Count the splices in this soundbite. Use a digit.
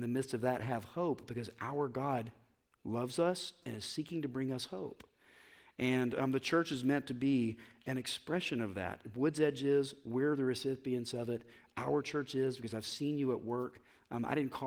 1